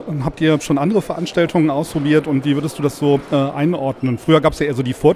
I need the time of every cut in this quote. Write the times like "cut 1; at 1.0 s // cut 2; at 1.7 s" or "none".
none